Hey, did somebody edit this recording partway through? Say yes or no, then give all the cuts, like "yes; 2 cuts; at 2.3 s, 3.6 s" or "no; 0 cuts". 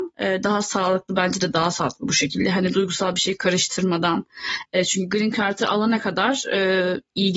no; 0 cuts